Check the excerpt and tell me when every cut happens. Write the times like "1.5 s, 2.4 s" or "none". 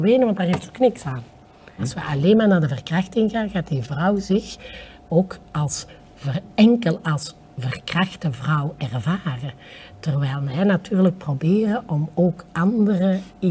none